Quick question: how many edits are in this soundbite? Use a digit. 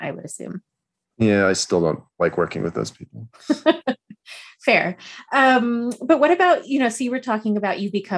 0